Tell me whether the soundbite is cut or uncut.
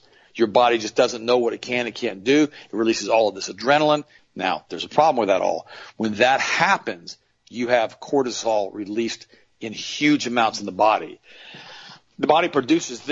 cut